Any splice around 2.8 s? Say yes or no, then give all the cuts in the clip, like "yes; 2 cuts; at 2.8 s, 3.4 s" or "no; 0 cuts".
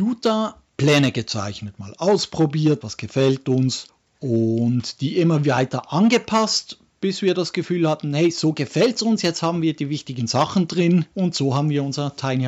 yes; 1 cut; at 2.8 s